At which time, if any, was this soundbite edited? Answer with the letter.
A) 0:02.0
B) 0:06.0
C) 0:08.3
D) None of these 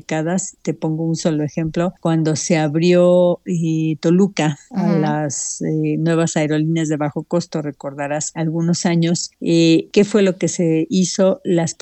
C